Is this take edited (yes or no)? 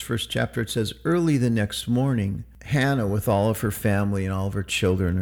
no